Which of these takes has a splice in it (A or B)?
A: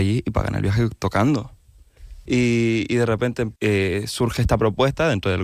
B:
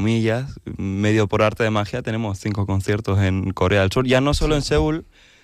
A